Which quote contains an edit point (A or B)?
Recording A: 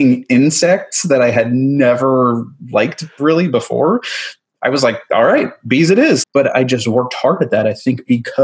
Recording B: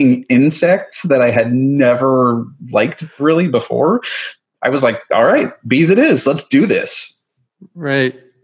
A